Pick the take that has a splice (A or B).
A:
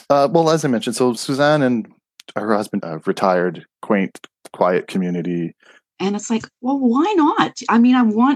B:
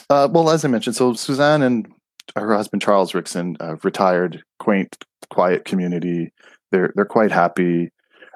A